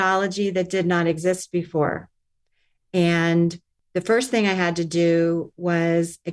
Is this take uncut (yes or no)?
yes